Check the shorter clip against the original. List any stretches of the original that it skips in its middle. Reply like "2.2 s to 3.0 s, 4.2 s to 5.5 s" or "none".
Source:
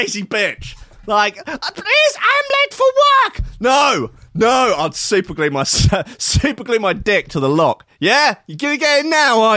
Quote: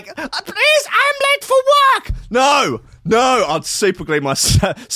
none